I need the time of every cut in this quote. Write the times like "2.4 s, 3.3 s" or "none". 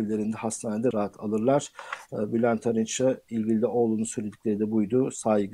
0.9 s